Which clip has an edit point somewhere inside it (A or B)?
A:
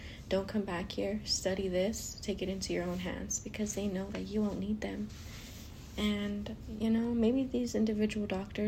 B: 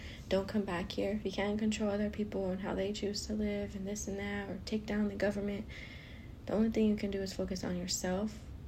B